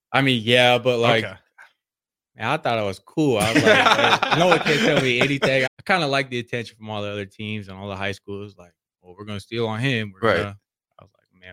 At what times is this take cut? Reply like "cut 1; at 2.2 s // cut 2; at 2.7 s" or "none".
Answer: cut 1; at 5.7 s